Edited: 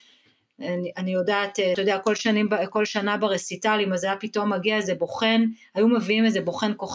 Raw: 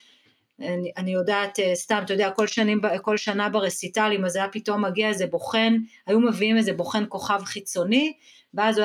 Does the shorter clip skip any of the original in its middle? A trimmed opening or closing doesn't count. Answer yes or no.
yes